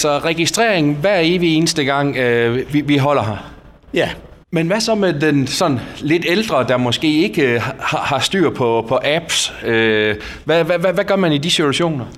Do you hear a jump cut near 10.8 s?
no; 1 cut; at 4.4 s

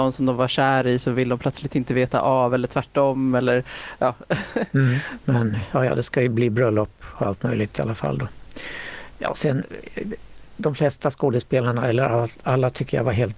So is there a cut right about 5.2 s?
yes; 1 cut; at 5.2 s

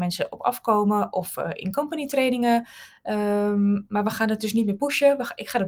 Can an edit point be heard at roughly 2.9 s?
no; 0 cuts

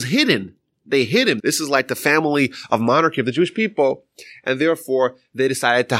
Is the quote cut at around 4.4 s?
no; 1 cut; at 1.4 s

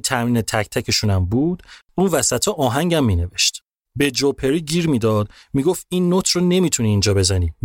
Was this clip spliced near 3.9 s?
yes; 1 cut; at 3.9 s

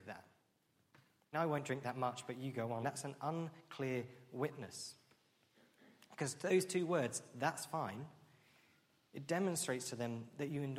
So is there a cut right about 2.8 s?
yes; 2 cuts; at 1.3 s, 2.8 s

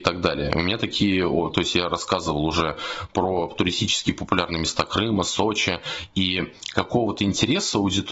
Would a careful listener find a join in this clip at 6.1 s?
no; 1 cut; at 1.5 s

